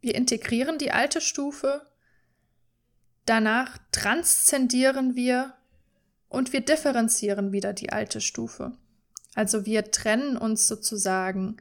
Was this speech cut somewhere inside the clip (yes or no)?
no